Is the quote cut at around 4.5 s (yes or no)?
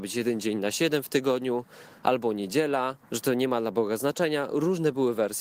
no